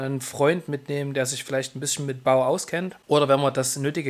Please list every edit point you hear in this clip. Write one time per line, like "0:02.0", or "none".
0:01.5